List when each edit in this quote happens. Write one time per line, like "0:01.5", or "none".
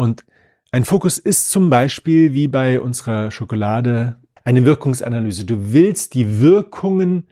0:04.4